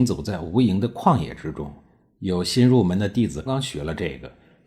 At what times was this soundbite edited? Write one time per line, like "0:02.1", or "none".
0:03.5